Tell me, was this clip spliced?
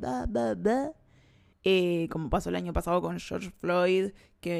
yes; 1 cut; at 1.5 s

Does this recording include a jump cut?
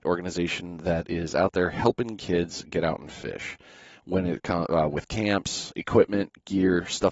no; 0 cuts

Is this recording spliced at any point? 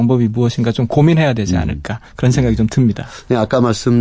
no; 0 cuts

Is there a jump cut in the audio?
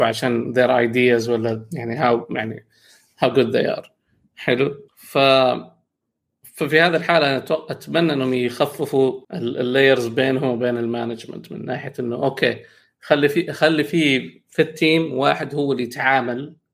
yes; 2 cuts; at 4.9 s, 9.2 s

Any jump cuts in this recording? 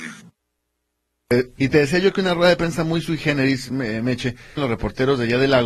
yes; 2 cuts; at 1.6 s, 4.6 s

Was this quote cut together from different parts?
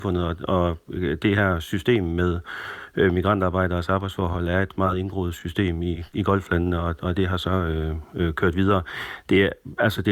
no; 0 cuts

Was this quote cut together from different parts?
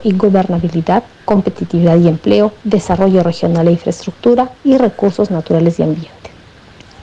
yes; 3 cuts; at 1.2 s, 2.6 s, 4.6 s

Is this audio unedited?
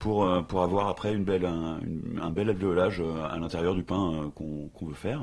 yes; 0 cuts

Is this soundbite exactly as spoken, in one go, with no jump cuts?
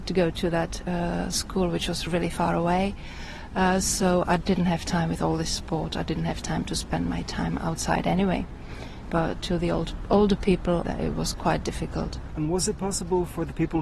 no; 2 cuts; at 9.0 s, 10.8 s

